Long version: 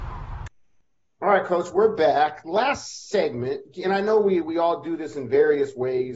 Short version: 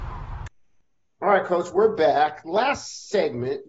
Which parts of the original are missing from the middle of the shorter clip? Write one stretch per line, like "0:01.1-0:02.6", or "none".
none